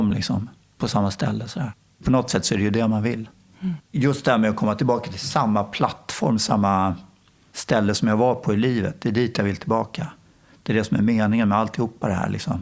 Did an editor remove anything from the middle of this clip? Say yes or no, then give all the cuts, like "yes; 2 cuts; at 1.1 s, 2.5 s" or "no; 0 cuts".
yes; 1 cut; at 3.8 s